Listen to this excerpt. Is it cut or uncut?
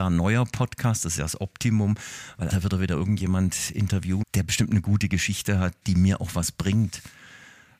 cut